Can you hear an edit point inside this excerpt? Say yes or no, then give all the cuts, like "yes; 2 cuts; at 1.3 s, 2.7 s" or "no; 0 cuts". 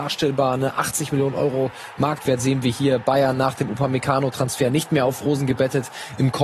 no; 0 cuts